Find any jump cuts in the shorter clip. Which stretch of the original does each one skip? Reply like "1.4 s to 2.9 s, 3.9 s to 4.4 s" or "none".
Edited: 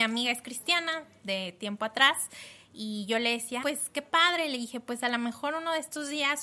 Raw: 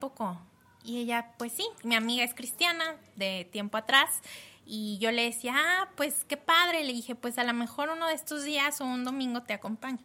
5.5 s to 5.9 s